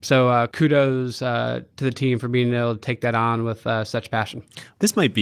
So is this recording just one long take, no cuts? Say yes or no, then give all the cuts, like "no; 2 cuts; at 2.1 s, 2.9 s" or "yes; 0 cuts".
yes; 0 cuts